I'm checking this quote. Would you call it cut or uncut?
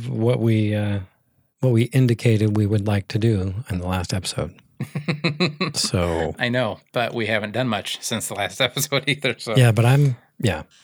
uncut